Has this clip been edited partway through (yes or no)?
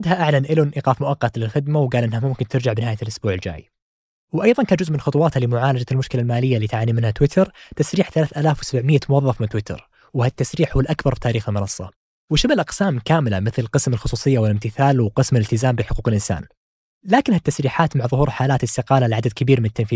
no